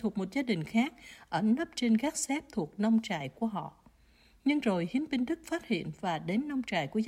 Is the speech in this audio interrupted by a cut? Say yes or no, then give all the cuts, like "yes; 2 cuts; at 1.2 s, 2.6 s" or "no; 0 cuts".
no; 0 cuts